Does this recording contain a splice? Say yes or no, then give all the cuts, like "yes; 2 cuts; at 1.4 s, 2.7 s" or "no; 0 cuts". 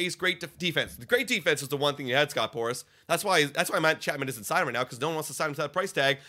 no; 0 cuts